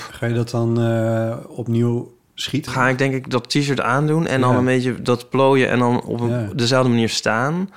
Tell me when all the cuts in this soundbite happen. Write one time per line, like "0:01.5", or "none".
0:02.7